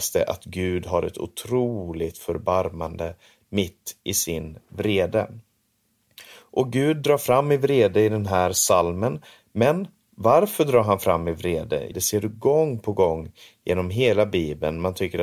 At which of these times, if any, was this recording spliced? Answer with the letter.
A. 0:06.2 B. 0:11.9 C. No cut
B